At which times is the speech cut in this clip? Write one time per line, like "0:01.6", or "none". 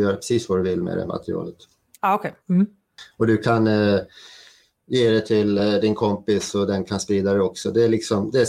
none